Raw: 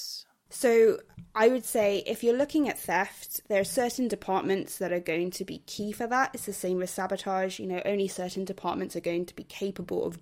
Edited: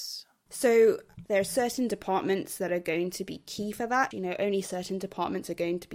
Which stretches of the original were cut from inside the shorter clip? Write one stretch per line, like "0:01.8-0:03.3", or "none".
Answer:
0:01.3-0:03.5
0:06.3-0:07.6